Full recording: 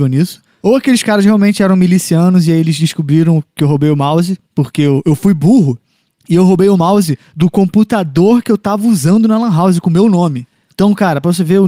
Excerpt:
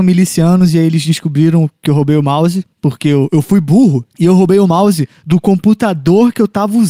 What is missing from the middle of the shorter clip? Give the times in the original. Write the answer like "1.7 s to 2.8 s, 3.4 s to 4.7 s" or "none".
5.8 s to 6.2 s

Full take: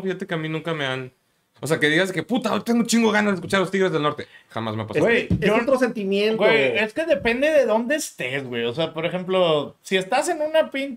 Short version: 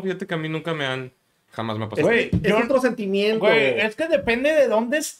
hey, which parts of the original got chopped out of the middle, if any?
1.5 s to 4.5 s

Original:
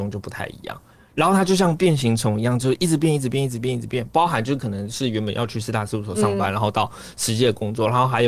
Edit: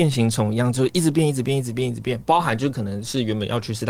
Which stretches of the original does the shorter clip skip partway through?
none

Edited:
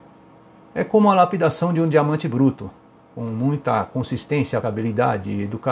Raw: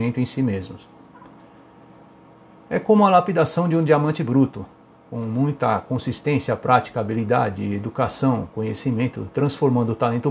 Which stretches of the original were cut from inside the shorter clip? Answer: 6.6 s to 6.9 s

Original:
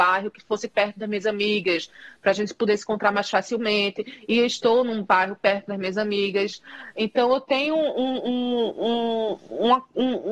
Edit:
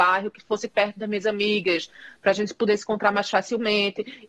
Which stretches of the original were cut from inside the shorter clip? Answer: none

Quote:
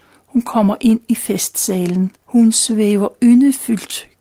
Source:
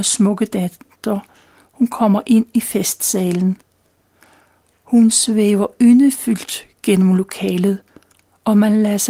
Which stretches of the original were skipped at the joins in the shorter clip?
3.7 s to 4.8 s

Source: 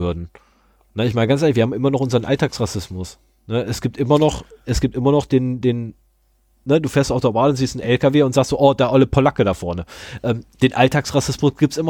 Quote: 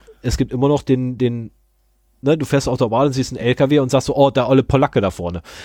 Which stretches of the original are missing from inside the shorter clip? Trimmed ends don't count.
none

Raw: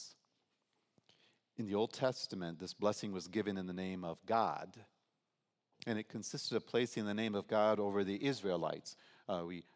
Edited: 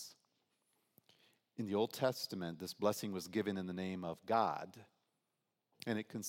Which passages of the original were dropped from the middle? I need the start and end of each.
none

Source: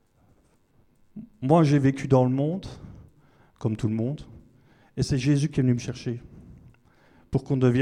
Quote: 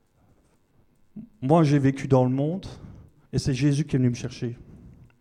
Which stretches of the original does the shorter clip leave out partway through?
3.3 s to 4.9 s

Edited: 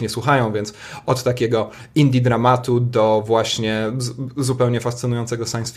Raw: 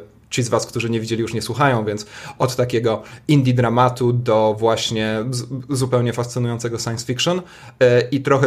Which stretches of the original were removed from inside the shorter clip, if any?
none

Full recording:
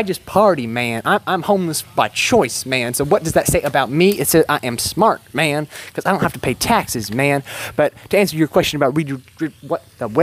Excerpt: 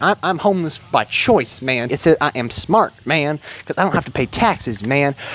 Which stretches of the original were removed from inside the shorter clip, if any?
2.9 s to 4.2 s

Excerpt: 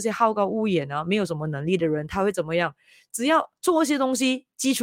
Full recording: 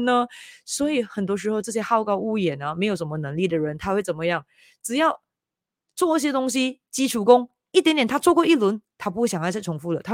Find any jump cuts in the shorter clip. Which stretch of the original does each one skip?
5.3 s to 5.9 s

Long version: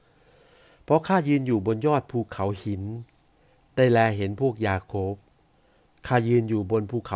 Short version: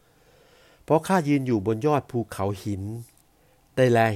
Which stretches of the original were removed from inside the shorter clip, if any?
none

